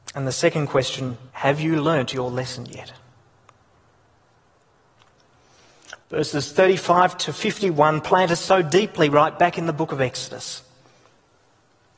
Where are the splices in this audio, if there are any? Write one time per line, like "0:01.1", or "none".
0:01.3
0:06.0